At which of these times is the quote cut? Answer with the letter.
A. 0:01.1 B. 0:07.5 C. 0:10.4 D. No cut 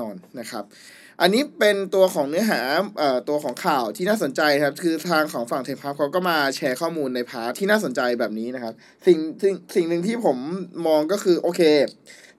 B